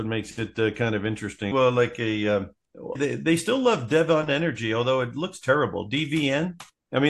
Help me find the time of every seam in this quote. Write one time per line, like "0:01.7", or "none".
0:01.5
0:03.0

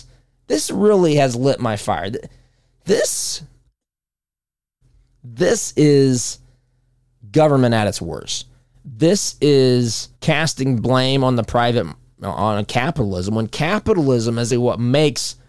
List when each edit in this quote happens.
0:08.7
0:10.1
0:14.5

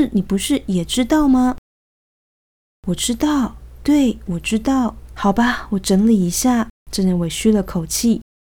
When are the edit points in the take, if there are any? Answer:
0:05.1

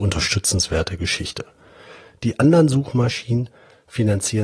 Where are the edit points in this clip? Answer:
none

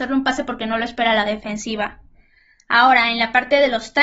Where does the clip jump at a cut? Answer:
none

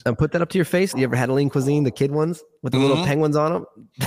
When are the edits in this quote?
0:00.9

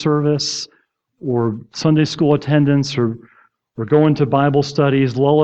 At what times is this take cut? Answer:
0:01.1

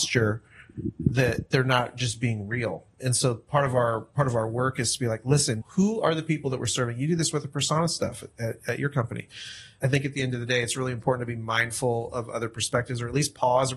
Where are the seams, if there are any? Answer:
0:05.6

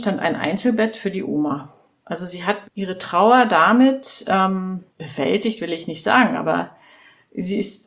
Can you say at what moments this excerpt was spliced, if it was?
0:02.6
0:04.9

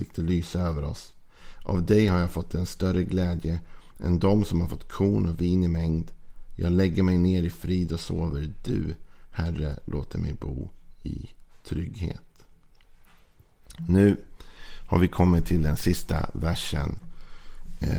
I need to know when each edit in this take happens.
none

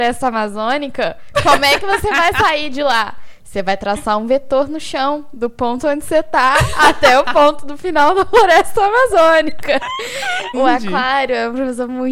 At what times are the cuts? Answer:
0:10.5

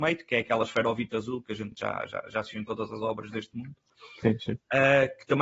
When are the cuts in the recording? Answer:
none

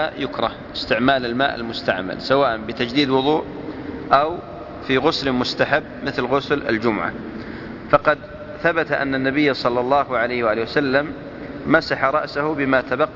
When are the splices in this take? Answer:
none

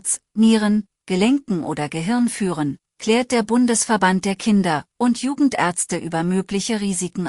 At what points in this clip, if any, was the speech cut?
none

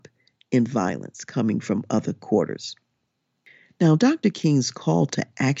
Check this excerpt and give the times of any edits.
none

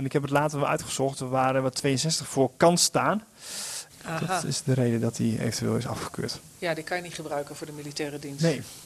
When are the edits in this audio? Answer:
0:03.9
0:06.5

